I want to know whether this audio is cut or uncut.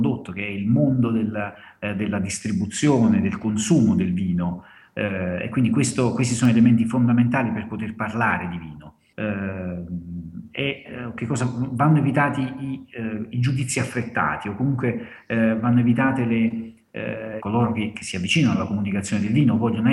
cut